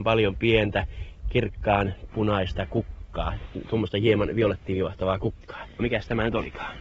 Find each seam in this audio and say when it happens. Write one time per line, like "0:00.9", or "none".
0:05.8